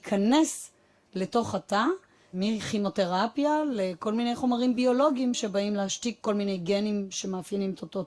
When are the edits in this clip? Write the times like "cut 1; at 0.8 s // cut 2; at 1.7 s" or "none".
cut 1; at 2.3 s